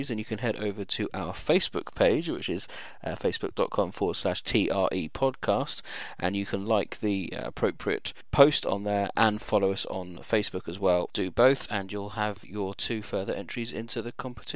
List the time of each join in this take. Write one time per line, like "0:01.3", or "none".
none

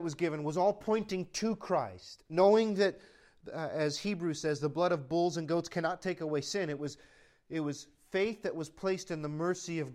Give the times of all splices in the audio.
none

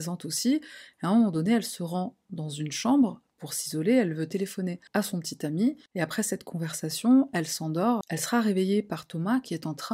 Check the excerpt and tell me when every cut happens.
0:04.9
0:08.0

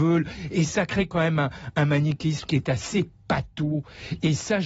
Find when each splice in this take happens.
none

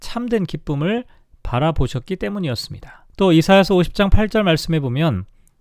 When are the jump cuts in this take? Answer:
0:03.1

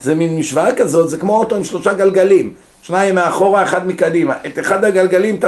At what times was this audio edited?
none

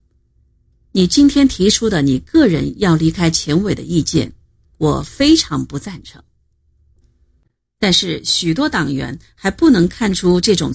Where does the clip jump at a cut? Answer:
0:07.0

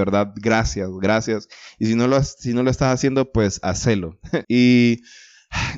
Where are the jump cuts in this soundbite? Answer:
0:04.4

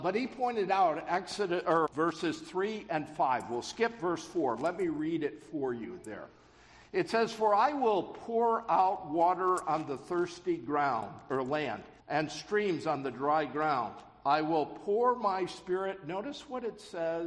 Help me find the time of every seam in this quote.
0:01.9
0:12.0

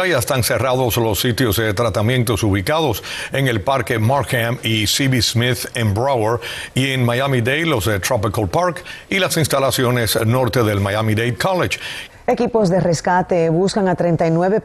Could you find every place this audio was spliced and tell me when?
0:12.1

